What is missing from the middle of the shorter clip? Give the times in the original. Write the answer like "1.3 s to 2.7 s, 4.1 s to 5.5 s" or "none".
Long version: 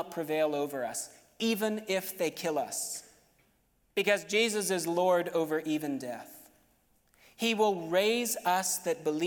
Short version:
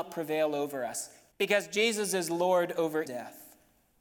1.3 s to 3.9 s, 5.6 s to 6.0 s

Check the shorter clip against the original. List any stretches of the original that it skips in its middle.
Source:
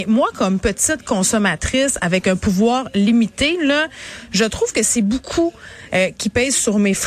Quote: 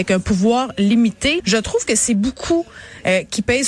3.6 s to 4.3 s

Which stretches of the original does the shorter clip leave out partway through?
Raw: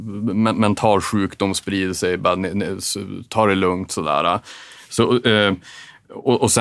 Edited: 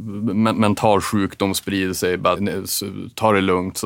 2.4 s to 2.5 s

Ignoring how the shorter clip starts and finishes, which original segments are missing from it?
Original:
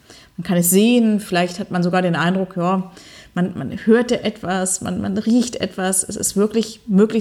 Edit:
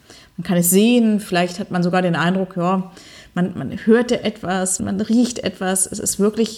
4.8 s to 5.0 s

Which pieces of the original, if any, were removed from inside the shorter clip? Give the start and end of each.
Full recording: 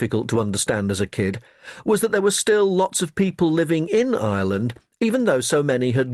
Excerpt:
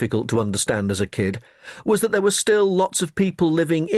none

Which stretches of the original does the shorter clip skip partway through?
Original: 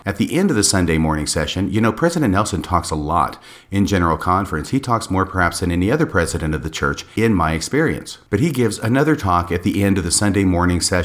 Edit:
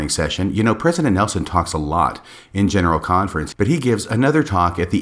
4.7 s to 8.2 s

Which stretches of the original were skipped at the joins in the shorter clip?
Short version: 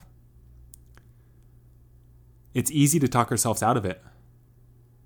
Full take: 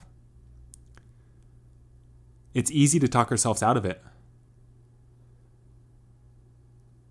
none

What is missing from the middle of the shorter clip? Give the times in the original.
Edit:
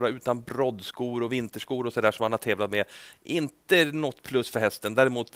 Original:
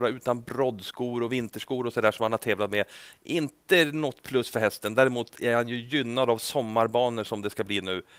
none

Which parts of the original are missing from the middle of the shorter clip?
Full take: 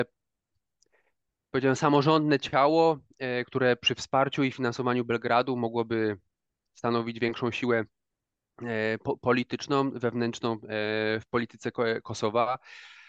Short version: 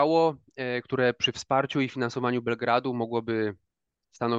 none

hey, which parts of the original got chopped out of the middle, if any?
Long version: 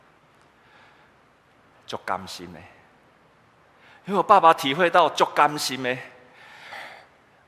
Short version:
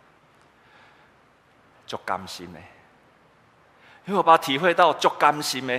4.2 s to 4.4 s

